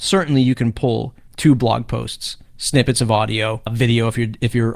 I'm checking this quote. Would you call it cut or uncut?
cut